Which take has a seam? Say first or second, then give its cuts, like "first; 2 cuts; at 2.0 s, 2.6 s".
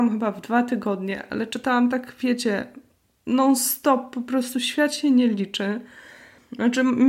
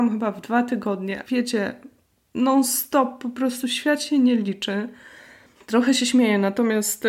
second; 2 cuts; at 1.2 s, 5.6 s